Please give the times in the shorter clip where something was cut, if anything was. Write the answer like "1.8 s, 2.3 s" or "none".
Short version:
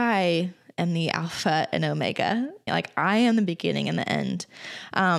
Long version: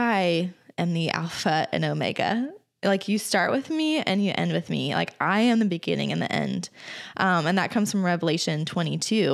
2.7 s

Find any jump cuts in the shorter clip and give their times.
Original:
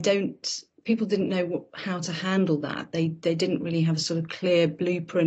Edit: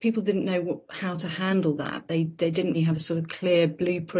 2.7 s

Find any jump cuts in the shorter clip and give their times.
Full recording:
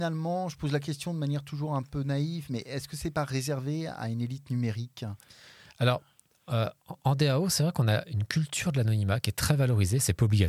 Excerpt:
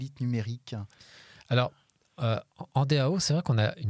none

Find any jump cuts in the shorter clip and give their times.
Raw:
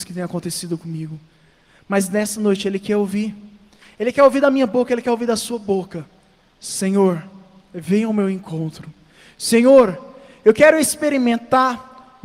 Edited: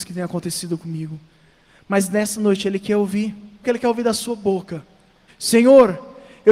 3.6 s, 5.3 s

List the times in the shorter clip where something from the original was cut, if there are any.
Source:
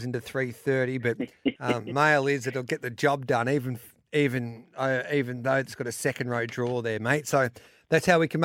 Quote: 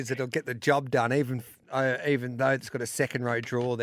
1.6 s

